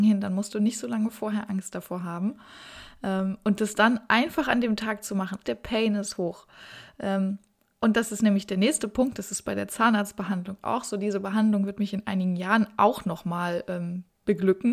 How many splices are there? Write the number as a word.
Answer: one